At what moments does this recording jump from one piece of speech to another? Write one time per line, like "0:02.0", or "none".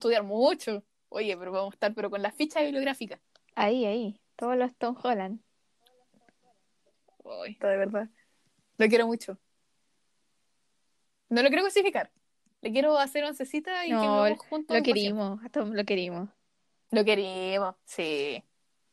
0:07.6